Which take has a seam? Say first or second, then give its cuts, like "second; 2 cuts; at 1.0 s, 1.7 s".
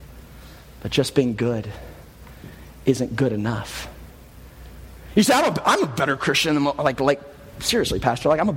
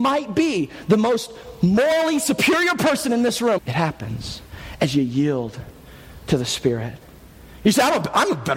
second; 2 cuts; at 3.6 s, 7.6 s